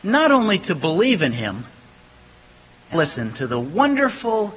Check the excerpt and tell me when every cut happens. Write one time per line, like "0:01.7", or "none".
0:02.9

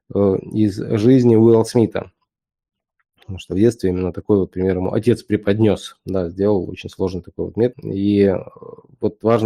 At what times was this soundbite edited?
0:07.7

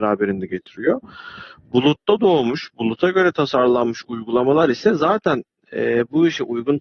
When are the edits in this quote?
none

